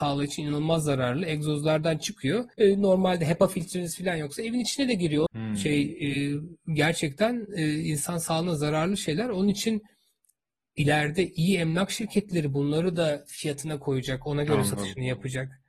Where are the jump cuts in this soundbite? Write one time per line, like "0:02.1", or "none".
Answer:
0:02.5
0:05.3